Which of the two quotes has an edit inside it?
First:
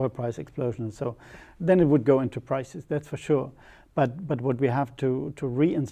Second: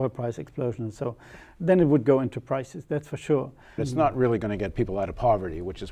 second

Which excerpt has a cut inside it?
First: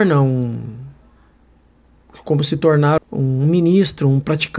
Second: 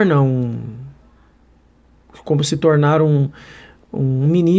first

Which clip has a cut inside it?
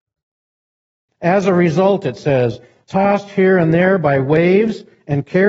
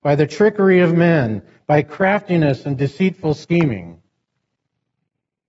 first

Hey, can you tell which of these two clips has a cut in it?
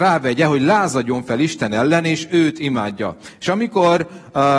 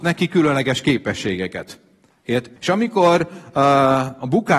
second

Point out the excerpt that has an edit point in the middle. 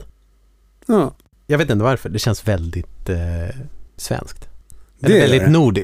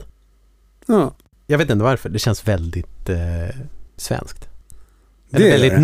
first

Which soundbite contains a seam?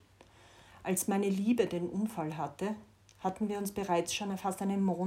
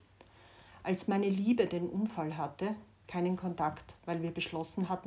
second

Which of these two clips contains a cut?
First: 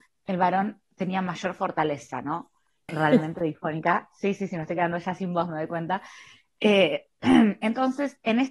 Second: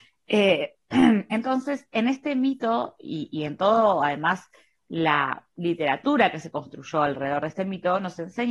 first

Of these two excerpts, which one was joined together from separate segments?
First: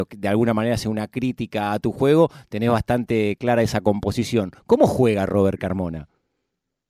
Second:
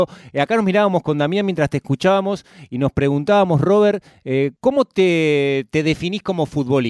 second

